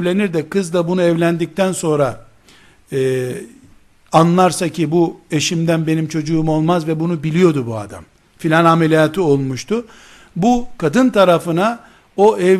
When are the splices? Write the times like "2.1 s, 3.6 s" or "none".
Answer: none